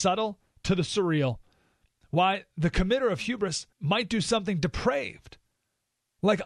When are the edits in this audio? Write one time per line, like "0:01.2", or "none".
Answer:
0:03.7